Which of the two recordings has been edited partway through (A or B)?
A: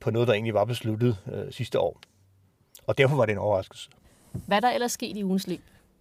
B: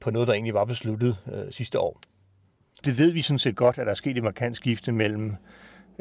B